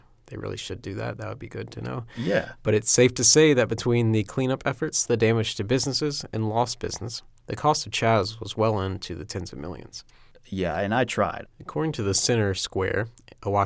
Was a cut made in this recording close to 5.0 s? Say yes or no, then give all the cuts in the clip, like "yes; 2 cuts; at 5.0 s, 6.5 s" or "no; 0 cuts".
yes; 2 cuts; at 5.0 s, 11.4 s